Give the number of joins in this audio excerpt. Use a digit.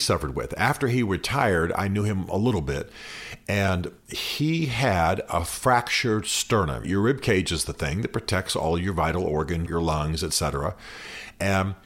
2